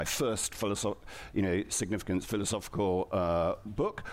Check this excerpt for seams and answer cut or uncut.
uncut